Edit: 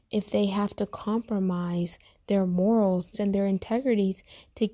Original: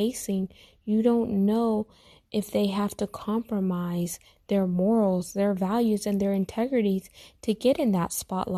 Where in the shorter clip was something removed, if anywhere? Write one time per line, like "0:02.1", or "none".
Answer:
0:03.1